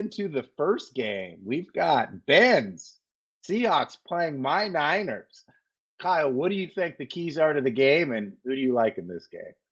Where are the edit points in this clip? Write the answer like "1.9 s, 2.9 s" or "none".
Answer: none